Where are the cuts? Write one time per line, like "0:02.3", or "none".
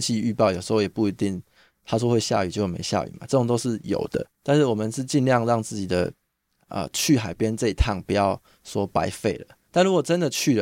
0:04.3